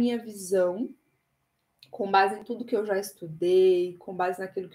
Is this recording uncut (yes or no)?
yes